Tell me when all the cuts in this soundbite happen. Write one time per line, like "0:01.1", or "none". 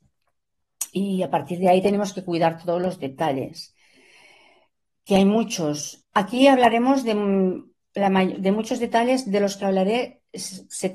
0:06.0